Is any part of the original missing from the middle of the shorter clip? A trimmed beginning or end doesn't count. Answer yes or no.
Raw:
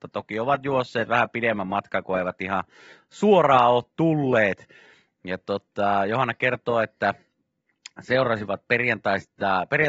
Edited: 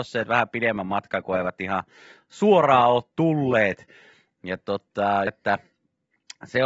yes